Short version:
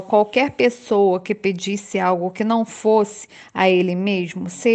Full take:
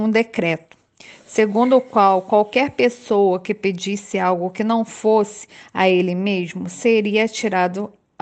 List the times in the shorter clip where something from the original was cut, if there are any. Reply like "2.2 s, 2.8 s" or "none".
none